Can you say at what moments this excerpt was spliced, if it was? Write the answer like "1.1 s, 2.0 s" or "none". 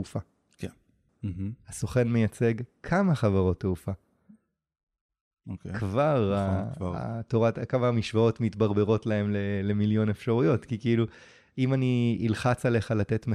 1.1 s